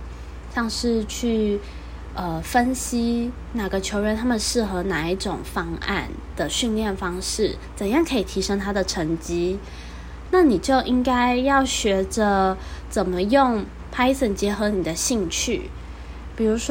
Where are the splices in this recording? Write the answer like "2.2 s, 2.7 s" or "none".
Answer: 10.3 s